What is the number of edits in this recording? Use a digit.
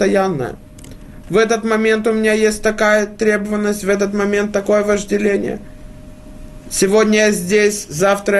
1